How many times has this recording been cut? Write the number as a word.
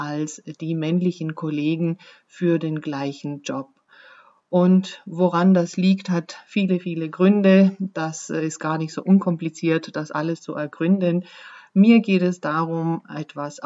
zero